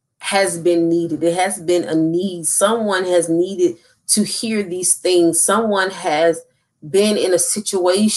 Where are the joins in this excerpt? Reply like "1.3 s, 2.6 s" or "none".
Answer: none